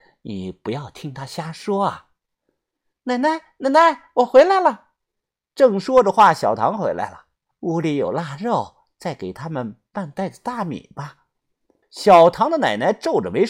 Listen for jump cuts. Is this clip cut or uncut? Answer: cut